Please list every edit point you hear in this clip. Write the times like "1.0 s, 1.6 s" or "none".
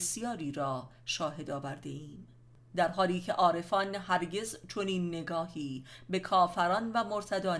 2.6 s